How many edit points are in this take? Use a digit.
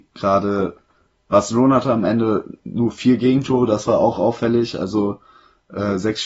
0